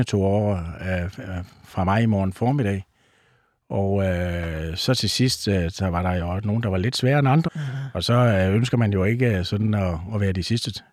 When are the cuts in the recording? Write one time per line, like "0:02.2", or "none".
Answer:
0:07.5